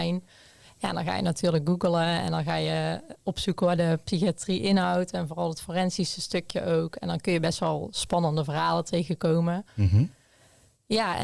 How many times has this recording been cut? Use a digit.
0